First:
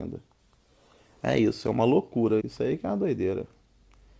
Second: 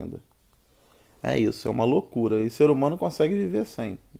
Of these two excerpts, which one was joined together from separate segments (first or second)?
first